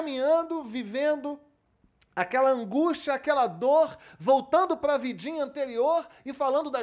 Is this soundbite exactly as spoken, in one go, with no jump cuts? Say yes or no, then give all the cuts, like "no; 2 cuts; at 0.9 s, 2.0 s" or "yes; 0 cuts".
yes; 0 cuts